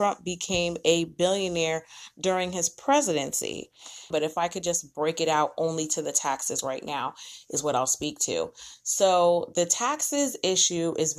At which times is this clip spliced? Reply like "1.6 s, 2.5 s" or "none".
4.1 s